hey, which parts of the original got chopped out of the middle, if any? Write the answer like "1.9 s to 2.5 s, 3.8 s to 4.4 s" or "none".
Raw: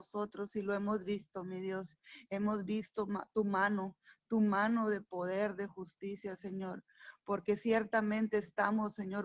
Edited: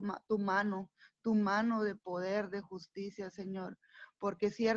none